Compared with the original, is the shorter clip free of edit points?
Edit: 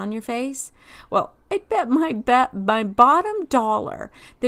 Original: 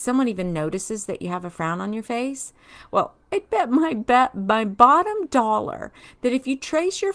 yes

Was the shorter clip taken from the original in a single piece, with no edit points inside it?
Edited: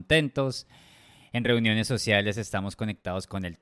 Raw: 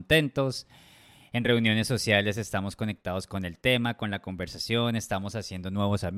yes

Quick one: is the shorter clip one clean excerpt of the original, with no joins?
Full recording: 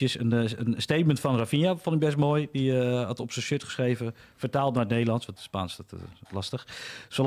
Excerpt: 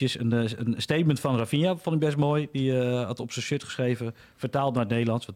yes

